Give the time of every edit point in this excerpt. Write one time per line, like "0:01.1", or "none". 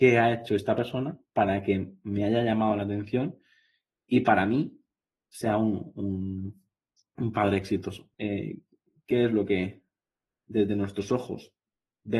0:08.1